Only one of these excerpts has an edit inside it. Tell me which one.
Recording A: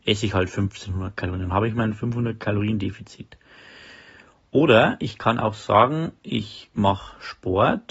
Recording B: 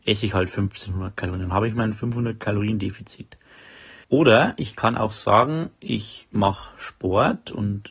B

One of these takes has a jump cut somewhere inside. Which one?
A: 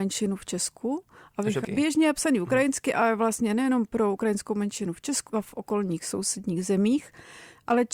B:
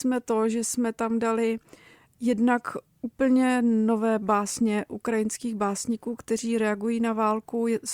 A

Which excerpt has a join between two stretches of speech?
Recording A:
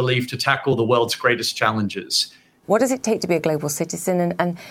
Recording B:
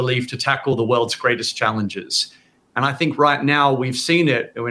A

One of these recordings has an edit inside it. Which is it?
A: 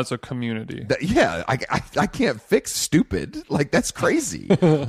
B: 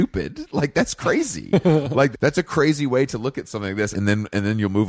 B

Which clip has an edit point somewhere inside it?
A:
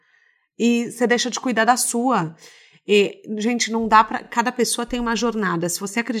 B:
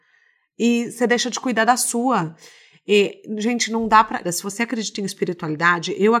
B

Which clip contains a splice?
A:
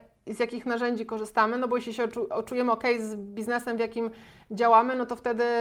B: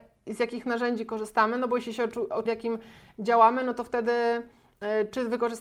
B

